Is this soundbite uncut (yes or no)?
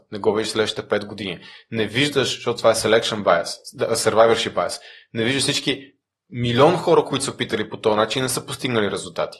yes